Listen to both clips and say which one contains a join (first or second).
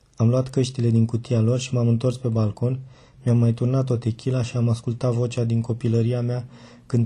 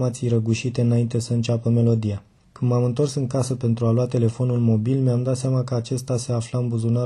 second